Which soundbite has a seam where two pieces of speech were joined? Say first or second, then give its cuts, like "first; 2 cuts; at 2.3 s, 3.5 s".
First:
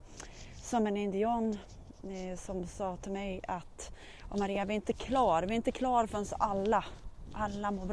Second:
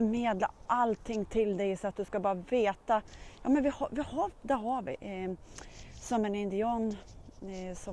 second; 1 cut; at 4.3 s